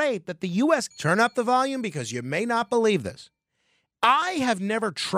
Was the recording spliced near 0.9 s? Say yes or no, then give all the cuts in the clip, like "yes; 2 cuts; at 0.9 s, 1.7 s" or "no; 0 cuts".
yes; 2 cuts; at 0.9 s, 3.9 s